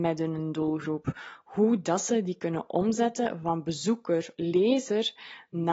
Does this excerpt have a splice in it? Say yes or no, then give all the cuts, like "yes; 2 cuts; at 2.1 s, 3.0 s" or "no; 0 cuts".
yes; 1 cut; at 4.3 s